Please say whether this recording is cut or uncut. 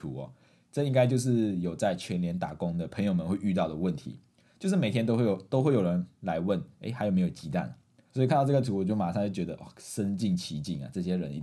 cut